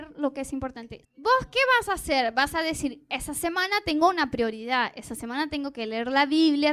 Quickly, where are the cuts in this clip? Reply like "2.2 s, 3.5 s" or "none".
1.0 s